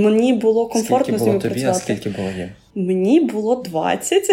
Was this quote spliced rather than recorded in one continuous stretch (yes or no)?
no